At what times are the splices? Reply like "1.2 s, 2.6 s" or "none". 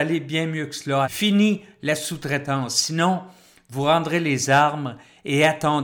1.0 s